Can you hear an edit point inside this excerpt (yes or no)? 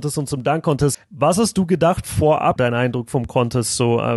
yes